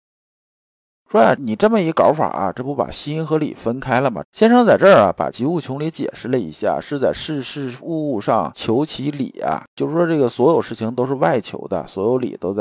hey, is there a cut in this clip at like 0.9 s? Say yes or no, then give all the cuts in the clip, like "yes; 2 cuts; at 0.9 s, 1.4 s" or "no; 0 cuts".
no; 3 cuts; at 4.2 s, 6.8 s, 9.7 s